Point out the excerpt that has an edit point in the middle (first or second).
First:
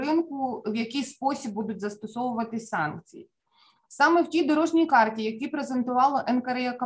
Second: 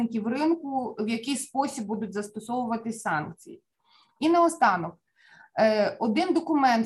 second